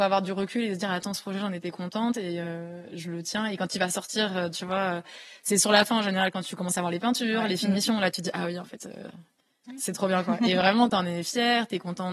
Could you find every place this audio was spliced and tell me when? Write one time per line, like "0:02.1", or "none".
none

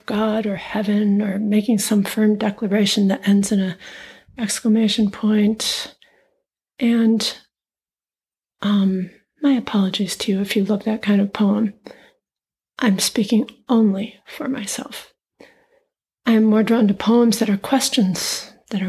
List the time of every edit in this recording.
none

